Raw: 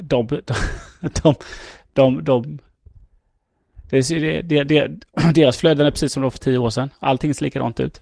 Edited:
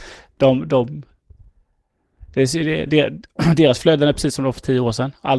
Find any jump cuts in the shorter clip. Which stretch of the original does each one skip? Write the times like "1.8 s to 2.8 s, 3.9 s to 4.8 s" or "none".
4.4 s to 4.6 s